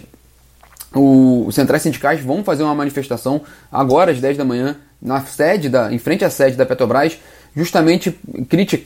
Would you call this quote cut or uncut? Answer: uncut